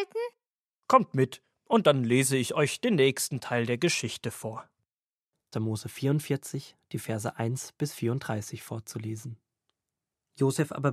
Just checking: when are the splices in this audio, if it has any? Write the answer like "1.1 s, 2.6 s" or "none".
5.5 s